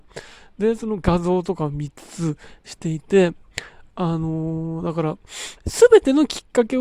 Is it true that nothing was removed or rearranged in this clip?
no; 1 cut; at 5.6 s

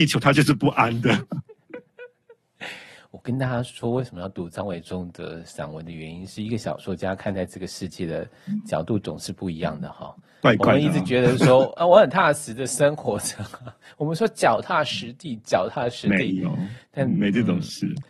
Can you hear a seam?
no; 0 cuts

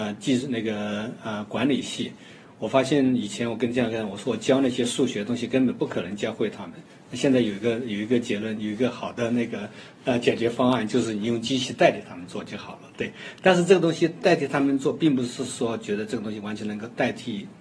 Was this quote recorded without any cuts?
yes; 0 cuts

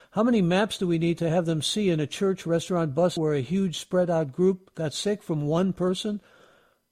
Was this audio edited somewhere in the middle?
yes; 1 cut; at 3.2 s

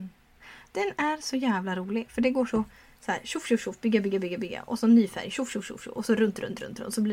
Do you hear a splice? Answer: no; 0 cuts

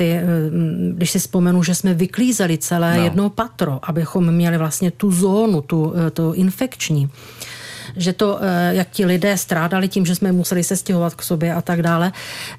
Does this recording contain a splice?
no; 0 cuts

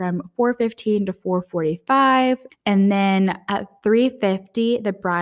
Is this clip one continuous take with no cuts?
no; 1 cut; at 2.5 s

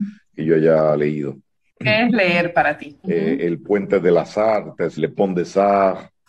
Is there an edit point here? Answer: yes; 2 cuts; at 3.0 s, 5.0 s

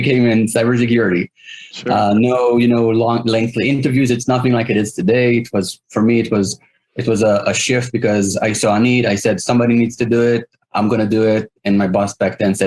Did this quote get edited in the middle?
no; 0 cuts

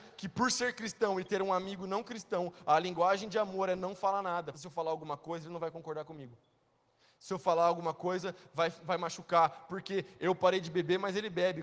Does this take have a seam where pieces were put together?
yes; 1 cut; at 4.5 s

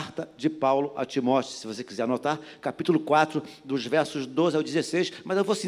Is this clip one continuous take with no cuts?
yes; 0 cuts

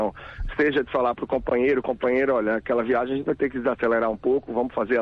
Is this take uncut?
yes; 0 cuts

